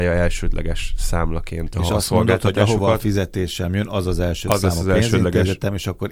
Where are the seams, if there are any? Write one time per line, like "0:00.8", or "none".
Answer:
none